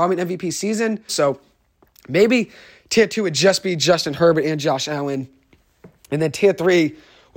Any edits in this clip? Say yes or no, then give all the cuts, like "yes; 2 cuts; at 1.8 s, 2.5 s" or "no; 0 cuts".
yes; 1 cut; at 1.1 s